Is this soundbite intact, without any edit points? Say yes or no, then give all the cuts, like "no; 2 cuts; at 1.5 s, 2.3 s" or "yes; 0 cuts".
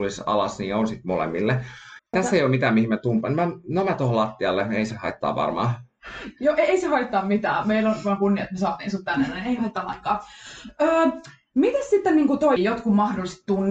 no; 2 cuts; at 2.0 s, 12.6 s